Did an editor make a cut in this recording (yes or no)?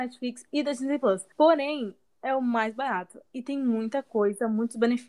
yes